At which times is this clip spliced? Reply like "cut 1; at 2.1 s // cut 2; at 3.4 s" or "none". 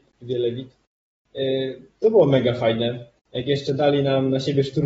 none

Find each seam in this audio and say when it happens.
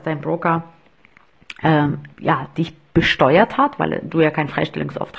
cut 1; at 2.1 s

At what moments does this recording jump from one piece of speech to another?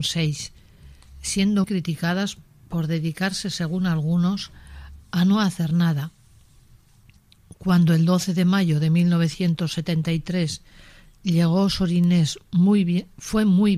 cut 1; at 1.6 s

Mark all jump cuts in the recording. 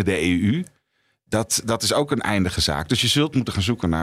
none

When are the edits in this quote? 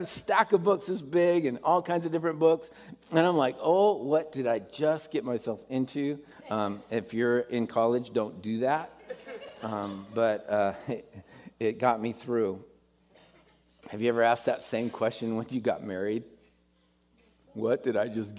cut 1; at 6.3 s

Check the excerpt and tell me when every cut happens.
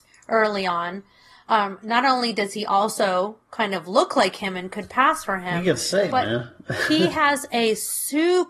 none

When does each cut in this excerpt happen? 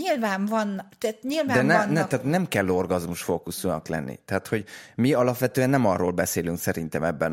none

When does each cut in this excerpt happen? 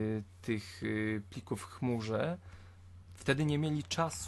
none

